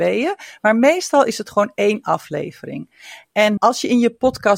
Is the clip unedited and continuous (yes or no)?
no